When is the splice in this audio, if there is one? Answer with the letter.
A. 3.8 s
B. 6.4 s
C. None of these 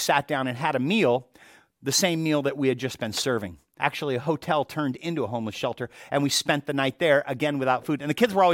A